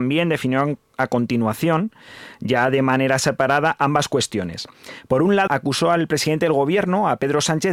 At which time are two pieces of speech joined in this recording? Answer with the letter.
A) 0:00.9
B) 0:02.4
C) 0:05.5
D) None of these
C